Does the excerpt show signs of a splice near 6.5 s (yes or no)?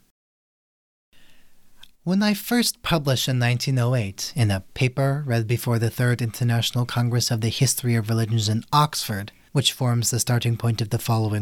no